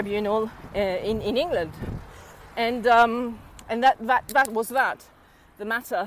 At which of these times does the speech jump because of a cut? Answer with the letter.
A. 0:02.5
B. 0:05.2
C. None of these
A